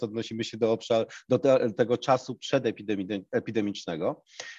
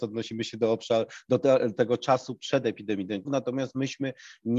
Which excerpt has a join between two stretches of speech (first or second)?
second